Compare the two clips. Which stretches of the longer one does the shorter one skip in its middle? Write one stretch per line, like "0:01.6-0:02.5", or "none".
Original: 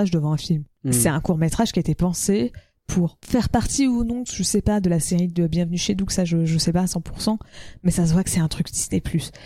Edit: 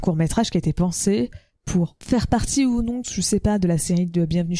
none